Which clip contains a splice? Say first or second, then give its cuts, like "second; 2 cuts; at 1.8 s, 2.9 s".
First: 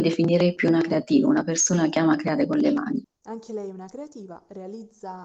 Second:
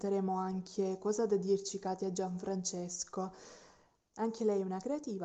first; 1 cut; at 3.0 s